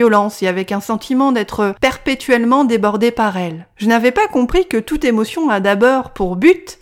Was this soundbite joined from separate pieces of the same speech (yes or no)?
no